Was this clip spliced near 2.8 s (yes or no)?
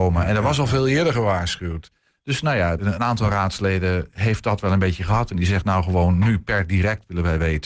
yes